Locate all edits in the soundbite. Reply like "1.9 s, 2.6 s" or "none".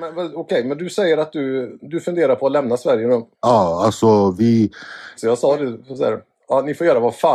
3.3 s, 5.2 s

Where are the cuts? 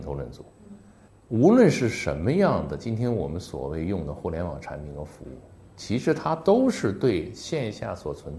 1.1 s

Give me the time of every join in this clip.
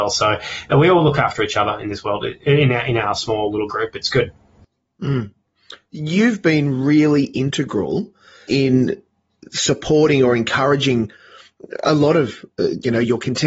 8.5 s

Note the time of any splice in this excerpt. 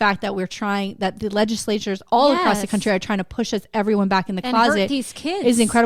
none

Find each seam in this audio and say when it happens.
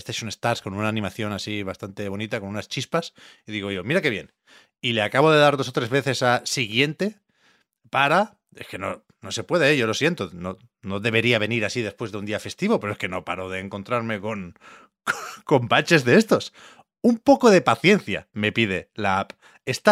none

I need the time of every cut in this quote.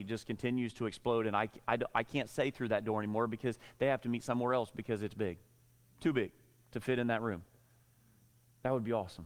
none

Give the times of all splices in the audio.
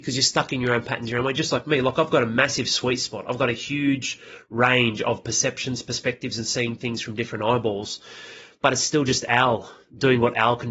none

